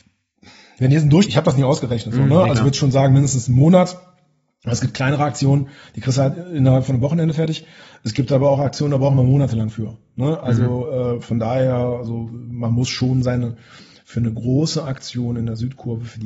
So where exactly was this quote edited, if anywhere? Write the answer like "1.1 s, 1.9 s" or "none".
1.3 s